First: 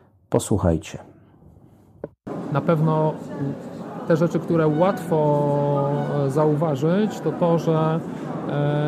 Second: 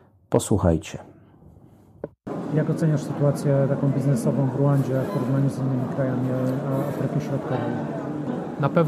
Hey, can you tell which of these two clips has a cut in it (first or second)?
first